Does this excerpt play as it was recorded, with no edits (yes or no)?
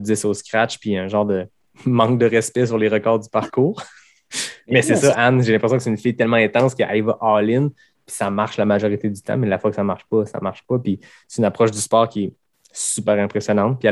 yes